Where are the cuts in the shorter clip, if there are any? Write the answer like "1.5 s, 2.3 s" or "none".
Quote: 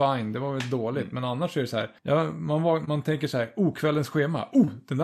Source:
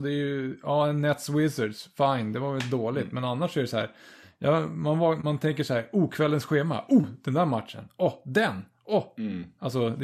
2.0 s